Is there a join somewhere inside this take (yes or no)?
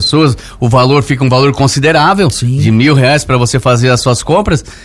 no